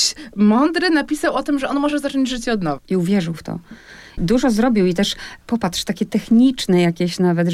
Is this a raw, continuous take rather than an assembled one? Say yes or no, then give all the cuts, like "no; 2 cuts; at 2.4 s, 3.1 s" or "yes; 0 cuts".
no; 1 cut; at 2.8 s